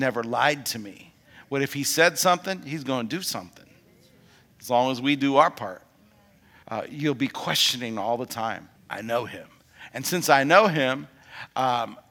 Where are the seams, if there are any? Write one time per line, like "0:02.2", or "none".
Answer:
0:06.6
0:08.8